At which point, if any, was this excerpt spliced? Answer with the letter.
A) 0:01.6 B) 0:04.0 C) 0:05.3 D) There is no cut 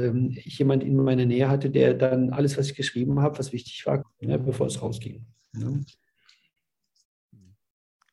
B